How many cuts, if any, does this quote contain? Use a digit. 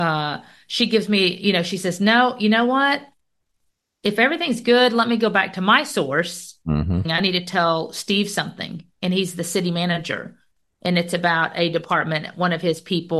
1